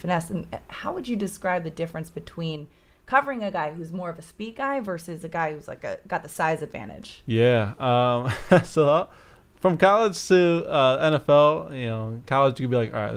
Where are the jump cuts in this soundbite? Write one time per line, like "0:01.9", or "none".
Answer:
none